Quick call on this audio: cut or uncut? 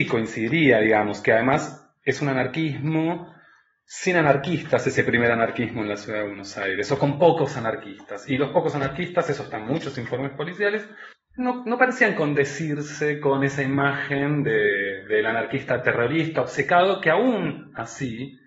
uncut